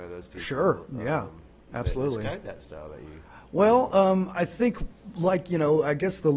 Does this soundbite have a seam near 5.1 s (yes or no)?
no